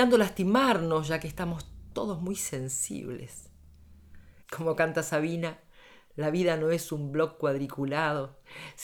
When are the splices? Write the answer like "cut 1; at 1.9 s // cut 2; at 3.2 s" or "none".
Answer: cut 1; at 4.4 s

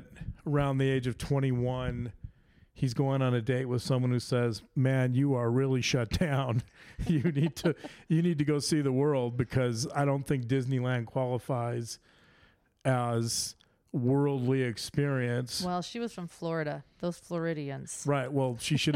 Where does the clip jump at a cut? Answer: none

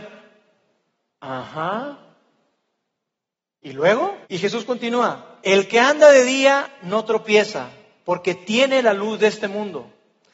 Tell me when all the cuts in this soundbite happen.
cut 1; at 4.2 s // cut 2; at 5.4 s

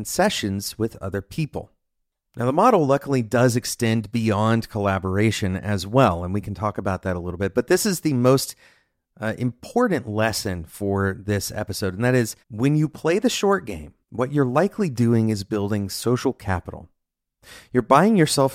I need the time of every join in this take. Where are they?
cut 1; at 12.4 s // cut 2; at 14.0 s

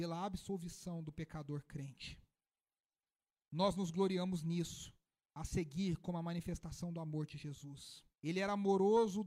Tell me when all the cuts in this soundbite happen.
cut 1; at 8.1 s

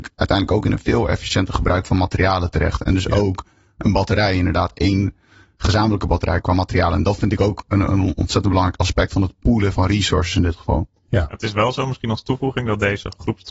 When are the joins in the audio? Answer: cut 1; at 6.4 s // cut 2; at 9.7 s

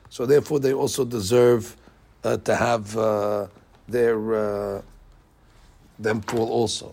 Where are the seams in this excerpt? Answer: none

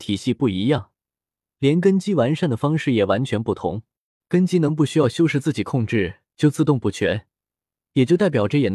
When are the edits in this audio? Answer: cut 1; at 4.2 s

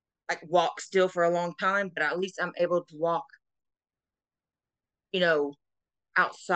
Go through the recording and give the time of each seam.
none

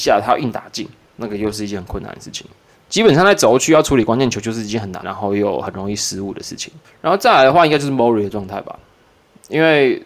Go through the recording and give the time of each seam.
cut 1; at 5.0 s // cut 2; at 6.8 s

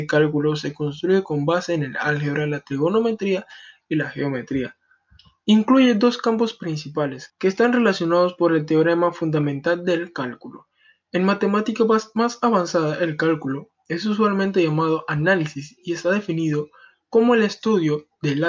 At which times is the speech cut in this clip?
cut 1; at 7.3 s

